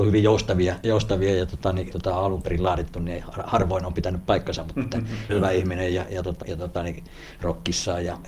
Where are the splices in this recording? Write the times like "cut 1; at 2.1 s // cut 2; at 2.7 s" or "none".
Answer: cut 1; at 1.9 s // cut 2; at 5.3 s // cut 3; at 6.4 s